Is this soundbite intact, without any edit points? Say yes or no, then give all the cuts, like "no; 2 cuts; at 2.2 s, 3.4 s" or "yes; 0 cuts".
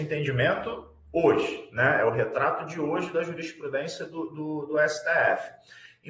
yes; 0 cuts